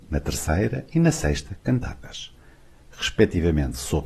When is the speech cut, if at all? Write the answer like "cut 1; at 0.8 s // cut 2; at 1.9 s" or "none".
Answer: none